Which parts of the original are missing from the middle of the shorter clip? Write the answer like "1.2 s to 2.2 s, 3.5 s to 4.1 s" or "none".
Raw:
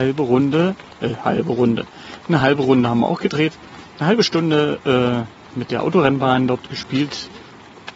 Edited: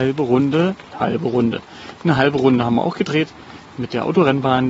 0.9 s to 1.2 s, 3.9 s to 5.4 s